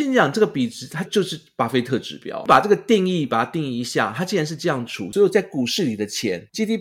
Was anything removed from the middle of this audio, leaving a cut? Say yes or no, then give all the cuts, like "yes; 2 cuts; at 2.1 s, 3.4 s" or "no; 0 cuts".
yes; 1 cut; at 1.0 s